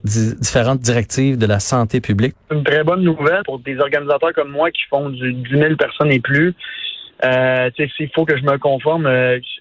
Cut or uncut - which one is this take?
cut